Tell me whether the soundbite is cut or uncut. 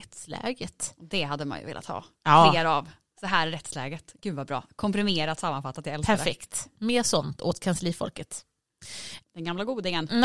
cut